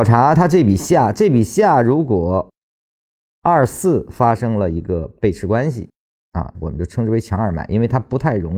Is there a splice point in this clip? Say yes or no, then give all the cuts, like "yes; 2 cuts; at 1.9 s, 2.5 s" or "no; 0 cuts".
yes; 1 cut; at 6.5 s